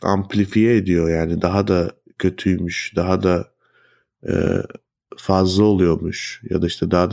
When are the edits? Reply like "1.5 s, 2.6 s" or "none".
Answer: none